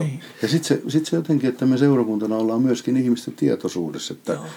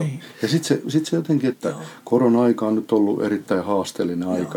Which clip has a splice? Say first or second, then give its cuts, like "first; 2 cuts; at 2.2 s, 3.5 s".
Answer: second; 1 cut; at 1.5 s